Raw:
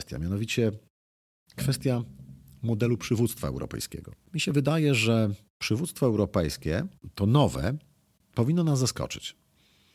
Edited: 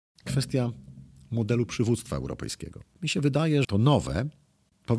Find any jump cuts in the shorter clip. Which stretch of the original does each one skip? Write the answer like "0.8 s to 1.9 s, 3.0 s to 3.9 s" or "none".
5.0 s to 7.1 s